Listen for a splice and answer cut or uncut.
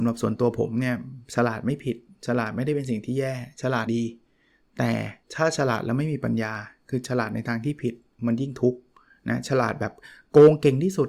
cut